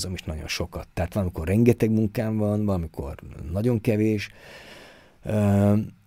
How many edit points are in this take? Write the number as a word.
zero